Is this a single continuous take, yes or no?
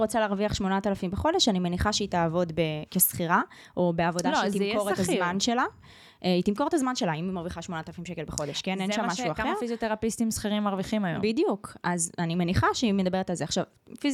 yes